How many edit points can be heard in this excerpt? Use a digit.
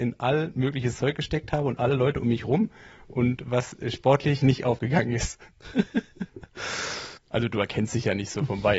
1